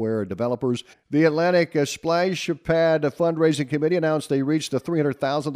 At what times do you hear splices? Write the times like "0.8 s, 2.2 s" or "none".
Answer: 0.9 s